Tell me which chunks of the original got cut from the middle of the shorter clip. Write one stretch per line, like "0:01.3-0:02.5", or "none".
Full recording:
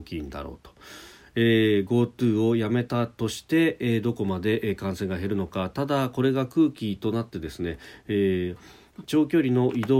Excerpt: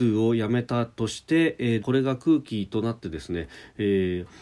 0:04.0-0:06.1